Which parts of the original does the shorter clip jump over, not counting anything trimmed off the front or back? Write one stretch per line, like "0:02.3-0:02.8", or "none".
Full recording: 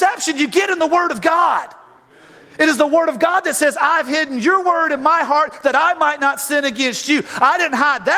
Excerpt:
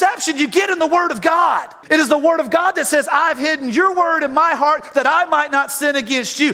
0:01.8-0:02.5